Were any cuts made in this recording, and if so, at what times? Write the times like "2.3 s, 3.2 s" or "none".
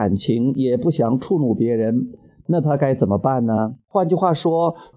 3.9 s